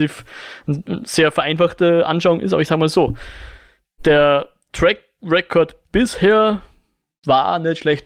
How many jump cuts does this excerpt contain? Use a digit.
0